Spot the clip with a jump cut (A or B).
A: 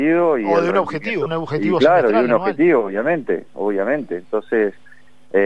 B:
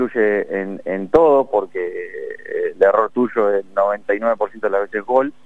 A